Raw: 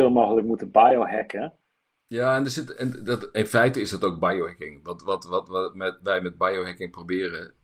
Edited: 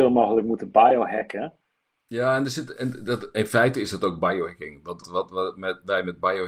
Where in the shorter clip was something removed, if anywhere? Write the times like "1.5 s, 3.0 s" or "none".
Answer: 5.0 s